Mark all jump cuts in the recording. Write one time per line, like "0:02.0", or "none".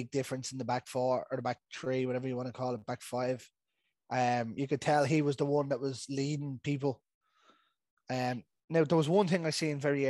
none